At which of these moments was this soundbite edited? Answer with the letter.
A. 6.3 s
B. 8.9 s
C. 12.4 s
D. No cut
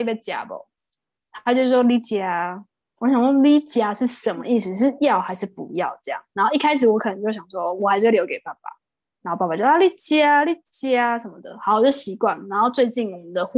D